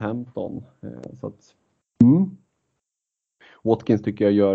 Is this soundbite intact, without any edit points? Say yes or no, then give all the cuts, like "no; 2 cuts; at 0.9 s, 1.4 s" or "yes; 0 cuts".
yes; 0 cuts